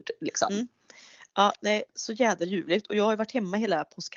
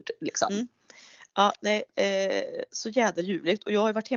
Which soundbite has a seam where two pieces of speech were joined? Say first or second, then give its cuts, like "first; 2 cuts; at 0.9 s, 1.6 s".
first; 1 cut; at 1.9 s